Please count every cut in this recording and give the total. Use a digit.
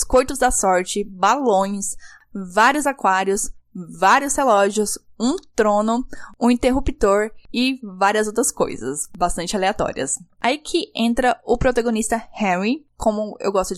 1